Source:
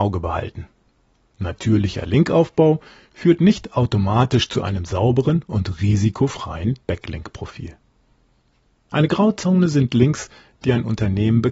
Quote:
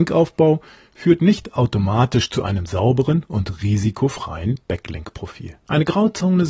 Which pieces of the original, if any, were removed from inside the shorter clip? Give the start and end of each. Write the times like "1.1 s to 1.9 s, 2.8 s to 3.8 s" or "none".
7.8 s to 8.8 s